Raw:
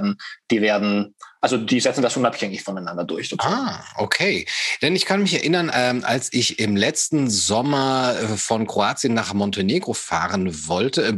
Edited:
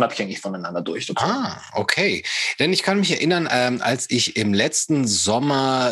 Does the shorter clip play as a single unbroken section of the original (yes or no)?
yes